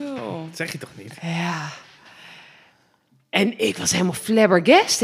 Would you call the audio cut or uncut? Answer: uncut